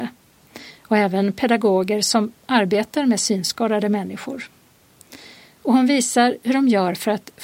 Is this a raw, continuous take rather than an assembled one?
yes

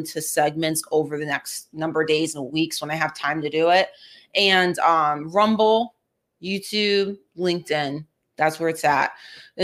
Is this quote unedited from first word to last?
yes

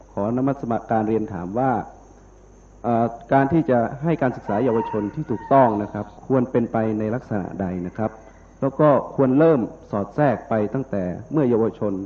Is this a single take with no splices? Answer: no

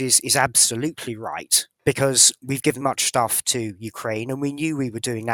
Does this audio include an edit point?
yes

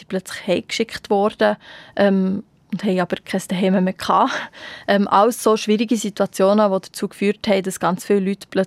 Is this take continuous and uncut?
yes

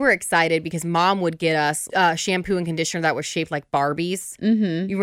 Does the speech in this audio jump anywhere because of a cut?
yes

